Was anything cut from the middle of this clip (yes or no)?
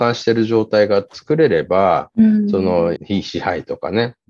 yes